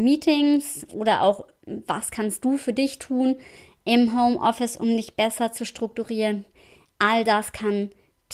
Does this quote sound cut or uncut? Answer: uncut